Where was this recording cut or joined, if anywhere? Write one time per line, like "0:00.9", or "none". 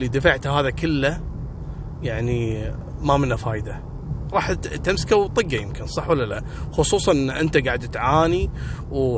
none